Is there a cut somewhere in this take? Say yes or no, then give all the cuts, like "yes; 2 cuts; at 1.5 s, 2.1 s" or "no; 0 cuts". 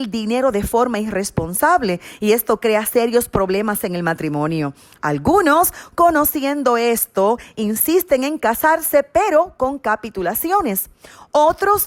no; 0 cuts